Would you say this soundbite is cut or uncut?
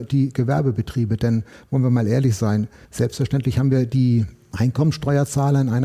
uncut